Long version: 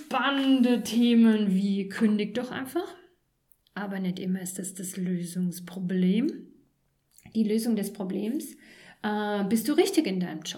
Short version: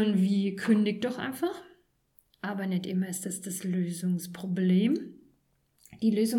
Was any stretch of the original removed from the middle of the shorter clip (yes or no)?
no